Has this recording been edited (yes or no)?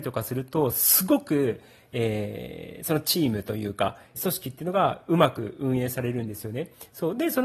yes